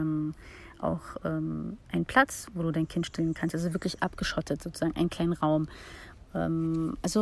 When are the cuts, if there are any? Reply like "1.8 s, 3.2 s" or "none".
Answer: none